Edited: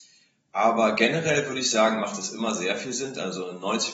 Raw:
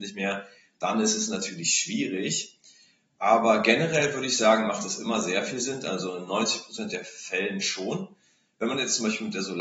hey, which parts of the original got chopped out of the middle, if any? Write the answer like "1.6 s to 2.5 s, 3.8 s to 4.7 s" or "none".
none